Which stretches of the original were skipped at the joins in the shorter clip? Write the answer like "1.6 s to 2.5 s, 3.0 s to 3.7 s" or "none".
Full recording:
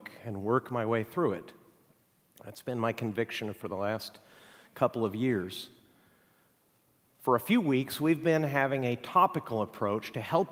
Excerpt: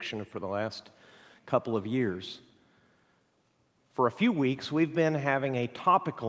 none